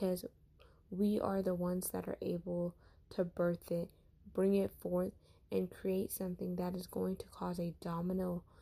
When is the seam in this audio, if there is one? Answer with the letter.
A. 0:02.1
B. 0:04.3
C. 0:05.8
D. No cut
D